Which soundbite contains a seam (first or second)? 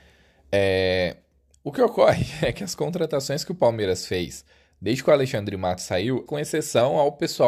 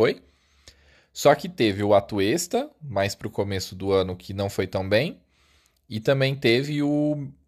first